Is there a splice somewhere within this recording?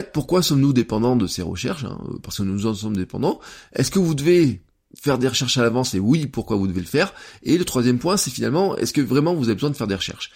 no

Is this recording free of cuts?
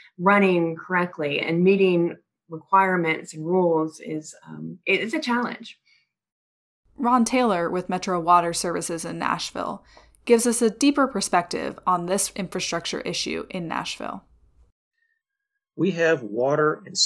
no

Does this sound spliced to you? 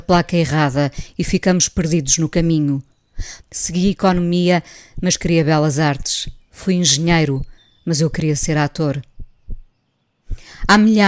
yes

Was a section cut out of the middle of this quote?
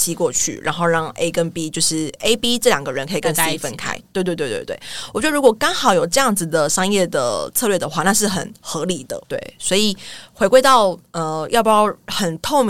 yes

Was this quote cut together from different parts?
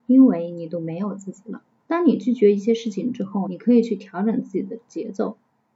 yes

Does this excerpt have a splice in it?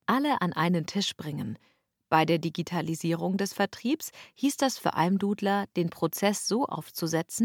no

